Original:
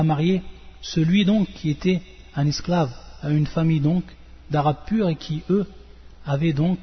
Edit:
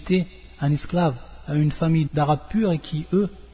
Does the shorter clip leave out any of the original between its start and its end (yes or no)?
yes